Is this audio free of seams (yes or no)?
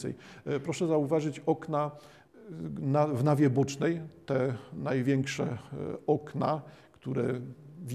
yes